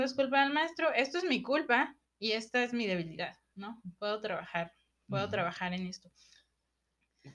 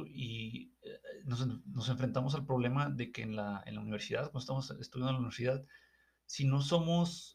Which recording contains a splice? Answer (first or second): first